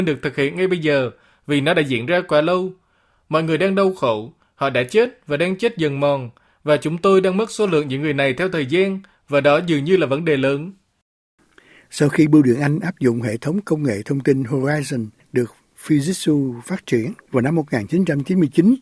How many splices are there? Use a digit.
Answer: 1